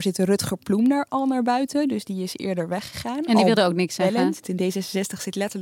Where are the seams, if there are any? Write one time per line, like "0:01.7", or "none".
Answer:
0:04.4

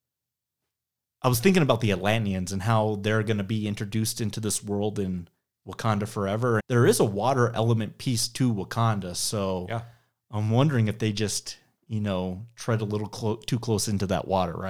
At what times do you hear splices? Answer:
0:06.6

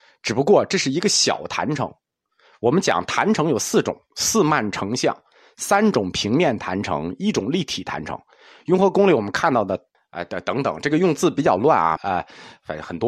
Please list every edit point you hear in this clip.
0:09.9
0:12.0

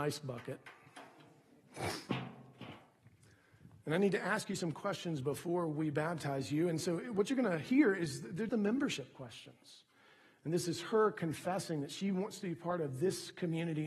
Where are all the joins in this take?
0:08.5

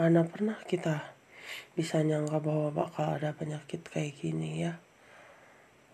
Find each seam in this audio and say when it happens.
none

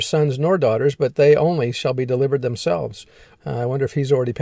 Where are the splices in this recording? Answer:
0:03.4

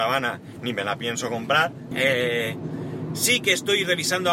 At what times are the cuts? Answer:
0:01.9

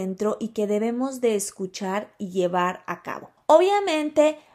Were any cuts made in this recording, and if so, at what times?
0:03.4

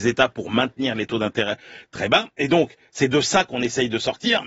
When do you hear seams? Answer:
none

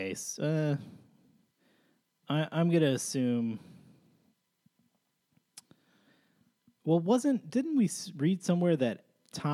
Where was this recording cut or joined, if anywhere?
none

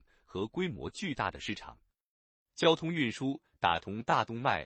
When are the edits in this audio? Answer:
none

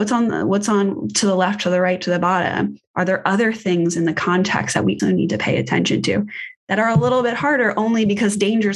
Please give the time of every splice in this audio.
0:05.0

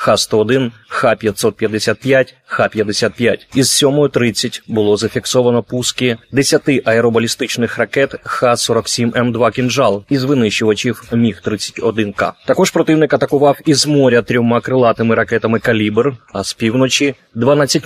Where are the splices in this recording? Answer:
none

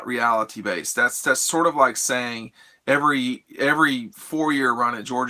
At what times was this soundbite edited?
none

